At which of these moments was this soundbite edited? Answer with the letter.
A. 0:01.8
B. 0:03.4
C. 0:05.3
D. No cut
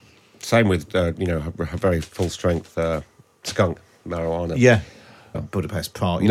C